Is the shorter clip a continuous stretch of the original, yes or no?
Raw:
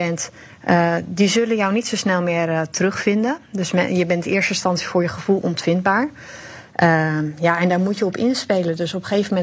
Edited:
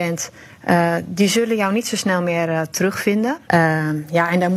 no